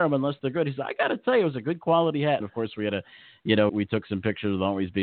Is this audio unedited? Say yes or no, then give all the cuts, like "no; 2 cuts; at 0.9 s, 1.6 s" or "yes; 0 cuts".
no; 2 cuts; at 2.4 s, 3.7 s